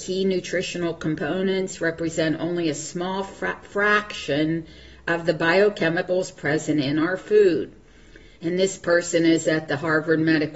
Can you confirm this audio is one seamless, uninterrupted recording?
no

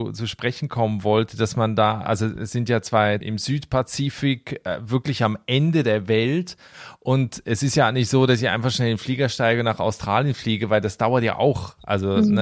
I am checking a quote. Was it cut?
yes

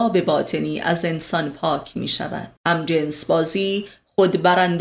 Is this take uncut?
no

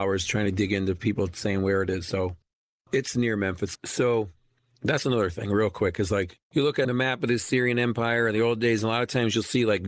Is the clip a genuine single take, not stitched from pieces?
no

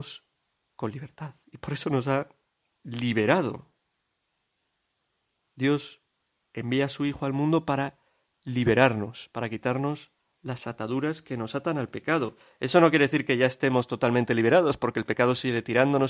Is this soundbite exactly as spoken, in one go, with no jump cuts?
yes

